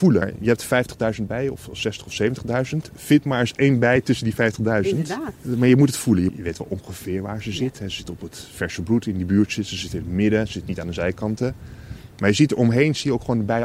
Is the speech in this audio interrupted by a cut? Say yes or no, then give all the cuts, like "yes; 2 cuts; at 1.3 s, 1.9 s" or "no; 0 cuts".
yes; 1 cut; at 6.3 s